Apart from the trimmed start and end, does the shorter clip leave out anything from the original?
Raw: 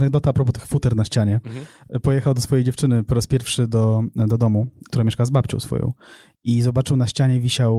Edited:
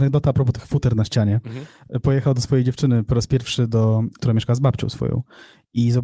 yes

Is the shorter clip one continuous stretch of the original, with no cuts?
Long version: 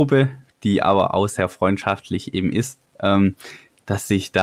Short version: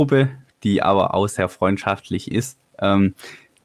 no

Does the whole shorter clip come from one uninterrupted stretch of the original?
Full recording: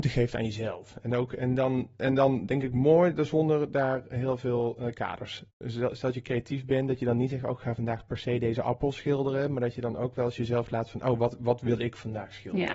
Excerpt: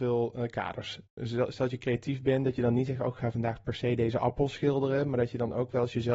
yes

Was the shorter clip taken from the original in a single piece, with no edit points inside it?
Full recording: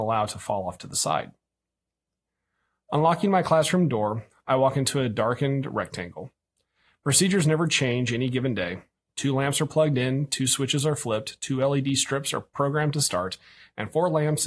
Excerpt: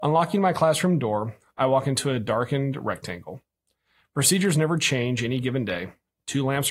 yes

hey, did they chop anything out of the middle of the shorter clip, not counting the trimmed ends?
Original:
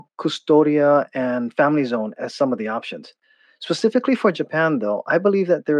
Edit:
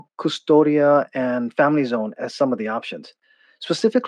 no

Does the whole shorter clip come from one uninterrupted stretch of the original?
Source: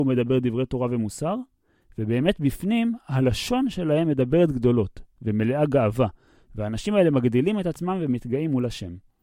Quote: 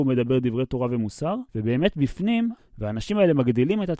no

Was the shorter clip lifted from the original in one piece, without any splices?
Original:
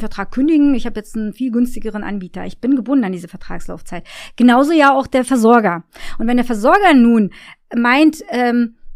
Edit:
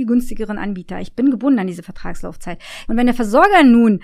no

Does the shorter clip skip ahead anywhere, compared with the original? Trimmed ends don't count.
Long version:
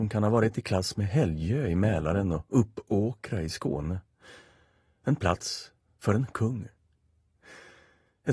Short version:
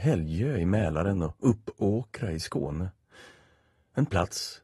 no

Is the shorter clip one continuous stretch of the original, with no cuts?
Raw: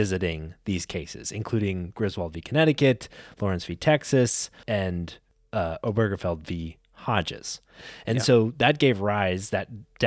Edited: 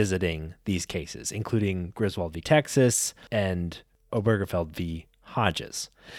no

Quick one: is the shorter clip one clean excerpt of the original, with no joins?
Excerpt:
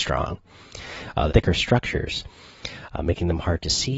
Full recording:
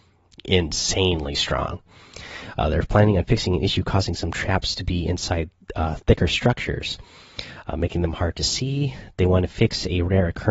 no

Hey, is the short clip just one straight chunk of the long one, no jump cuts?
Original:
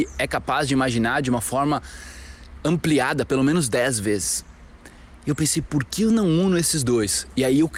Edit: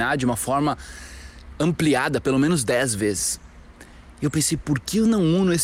yes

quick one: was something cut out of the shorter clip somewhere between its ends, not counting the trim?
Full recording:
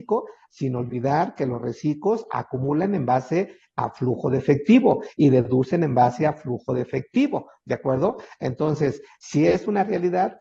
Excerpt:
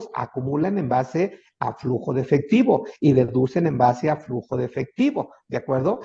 no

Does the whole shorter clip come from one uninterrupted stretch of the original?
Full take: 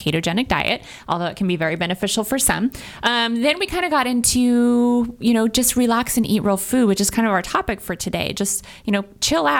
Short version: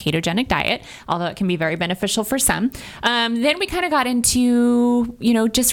yes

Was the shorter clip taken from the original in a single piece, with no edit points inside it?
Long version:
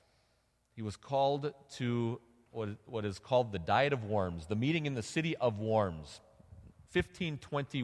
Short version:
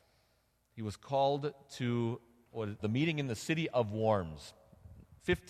no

